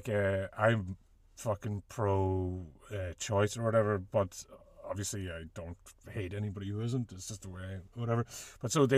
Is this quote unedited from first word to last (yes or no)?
yes